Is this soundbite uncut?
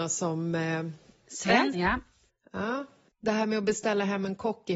no; 2 cuts; at 1.7 s, 3.1 s

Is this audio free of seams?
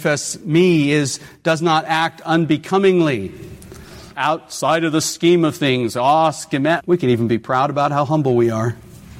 no; 2 cuts; at 4.1 s, 6.8 s

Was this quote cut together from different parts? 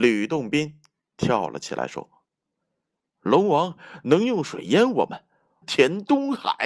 yes; 1 cut; at 5.6 s

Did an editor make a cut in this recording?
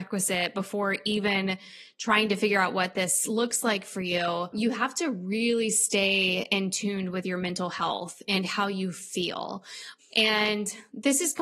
yes; 1 cut; at 10.0 s

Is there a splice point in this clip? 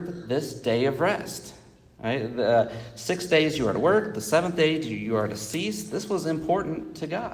no; 0 cuts

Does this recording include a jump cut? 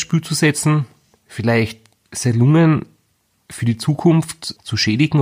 no; 0 cuts

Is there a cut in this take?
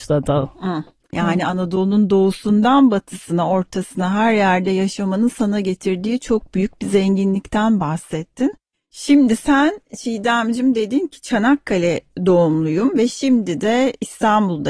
yes; 2 cuts; at 1.1 s, 8.7 s

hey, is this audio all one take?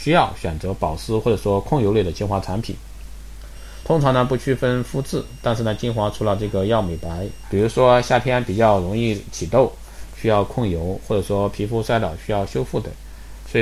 no; 2 cuts; at 3.8 s, 7.4 s

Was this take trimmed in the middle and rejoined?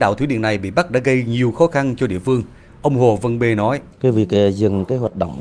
yes; 2 cuts; at 2.7 s, 3.9 s

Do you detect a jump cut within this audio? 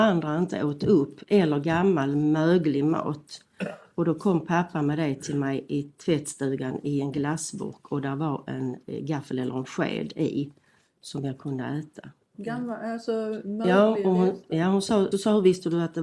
yes; 2 cuts; at 12.3 s, 15.1 s

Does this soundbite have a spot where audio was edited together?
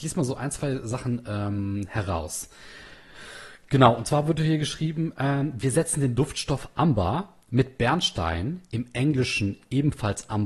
no; 0 cuts

